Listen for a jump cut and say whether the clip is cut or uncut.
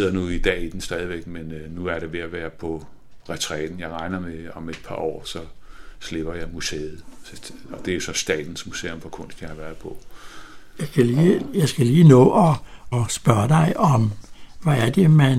cut